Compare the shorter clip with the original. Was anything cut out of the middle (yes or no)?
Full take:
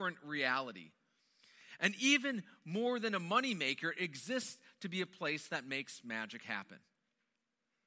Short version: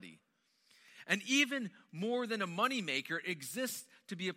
no